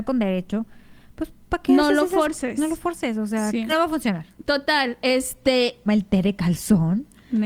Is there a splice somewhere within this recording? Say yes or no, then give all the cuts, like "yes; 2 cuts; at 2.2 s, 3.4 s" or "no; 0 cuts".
yes; 2 cuts; at 3.7 s, 5.9 s